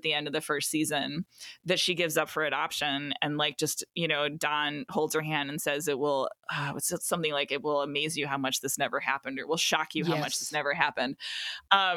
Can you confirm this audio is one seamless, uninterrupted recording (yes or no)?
yes